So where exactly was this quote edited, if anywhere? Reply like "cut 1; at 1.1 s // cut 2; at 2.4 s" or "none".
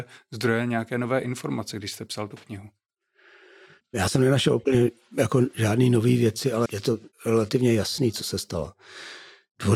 cut 1; at 6.7 s